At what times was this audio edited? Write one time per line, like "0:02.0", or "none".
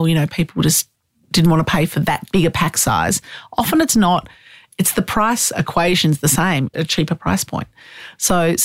0:06.7